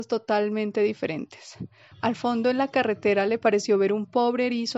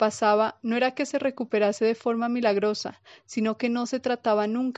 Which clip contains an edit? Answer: first; 1 cut; at 1.9 s

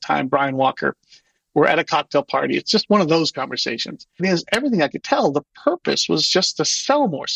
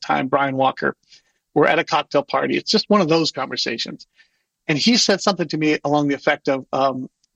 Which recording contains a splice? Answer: first; 1 cut; at 4.2 s

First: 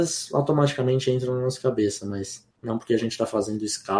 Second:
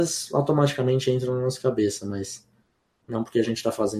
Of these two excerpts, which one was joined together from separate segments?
first; 1 cut; at 2.5 s

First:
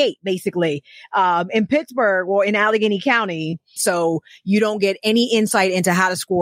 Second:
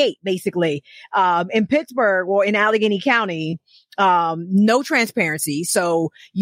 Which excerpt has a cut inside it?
first; 1 cut; at 3.8 s

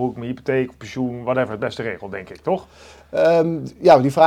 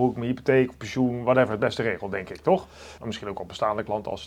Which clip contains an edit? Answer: second; 1 cut; at 3.0 s

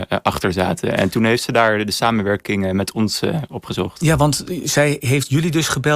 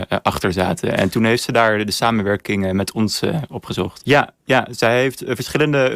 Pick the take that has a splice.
second; 1 cut; at 4.0 s

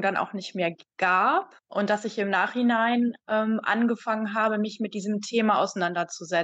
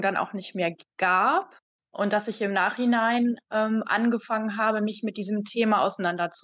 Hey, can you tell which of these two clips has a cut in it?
first; 1 cut; at 1.6 s

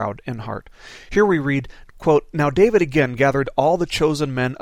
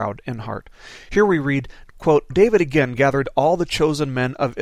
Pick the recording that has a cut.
second; 1 cut; at 2.3 s

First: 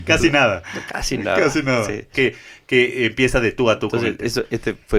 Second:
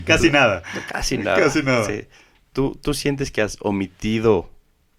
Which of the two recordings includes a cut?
first; 1 cut; at 2.1 s

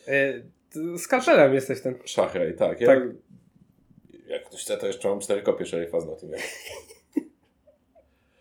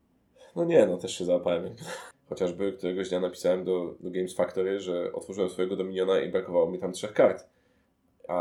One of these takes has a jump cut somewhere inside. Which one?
second; 1 cut; at 2.1 s

